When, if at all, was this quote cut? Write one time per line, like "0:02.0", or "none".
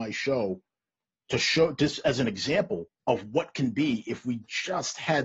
0:03.0